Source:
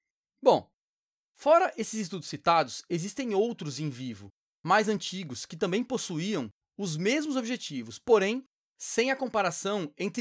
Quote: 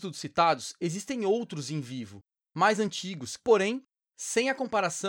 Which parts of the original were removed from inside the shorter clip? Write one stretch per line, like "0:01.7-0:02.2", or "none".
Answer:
0:05.5-0:08.0